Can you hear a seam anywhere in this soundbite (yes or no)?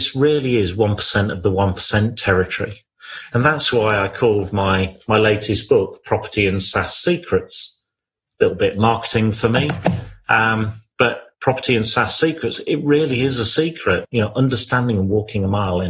yes